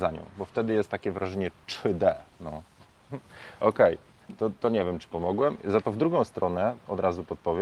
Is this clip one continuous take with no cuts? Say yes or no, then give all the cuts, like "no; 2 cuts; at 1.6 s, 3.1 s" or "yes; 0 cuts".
yes; 0 cuts